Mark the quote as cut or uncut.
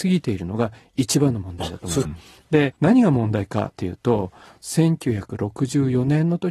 cut